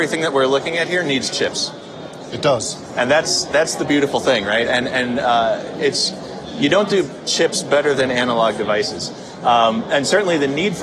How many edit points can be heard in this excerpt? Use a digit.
0